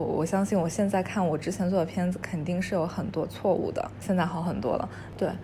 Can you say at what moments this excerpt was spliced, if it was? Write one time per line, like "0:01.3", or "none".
0:04.0